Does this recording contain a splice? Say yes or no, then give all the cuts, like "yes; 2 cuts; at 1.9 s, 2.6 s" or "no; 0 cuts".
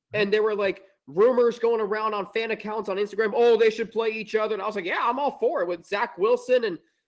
no; 0 cuts